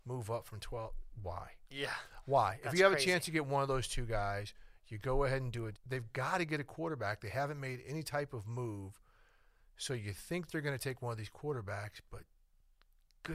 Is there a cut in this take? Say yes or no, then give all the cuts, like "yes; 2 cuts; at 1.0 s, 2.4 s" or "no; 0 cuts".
yes; 1 cut; at 5.7 s